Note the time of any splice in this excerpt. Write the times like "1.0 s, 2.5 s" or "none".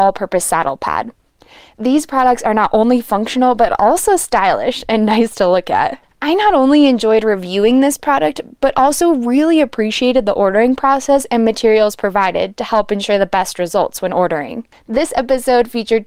6.0 s, 14.7 s